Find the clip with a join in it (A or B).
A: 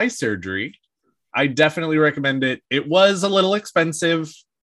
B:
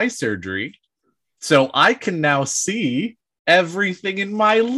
A